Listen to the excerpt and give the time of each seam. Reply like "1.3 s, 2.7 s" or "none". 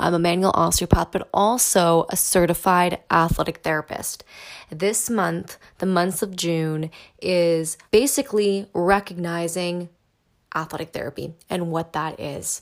7.8 s